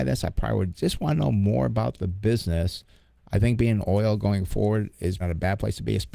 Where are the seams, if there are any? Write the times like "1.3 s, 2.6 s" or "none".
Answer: 3.2 s, 5.2 s